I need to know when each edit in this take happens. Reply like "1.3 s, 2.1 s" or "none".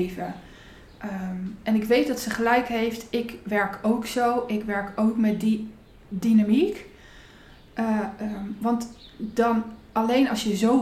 none